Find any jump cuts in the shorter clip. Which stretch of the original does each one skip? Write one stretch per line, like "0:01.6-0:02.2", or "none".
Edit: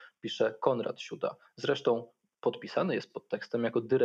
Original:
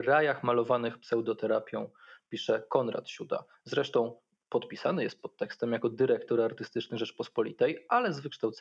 none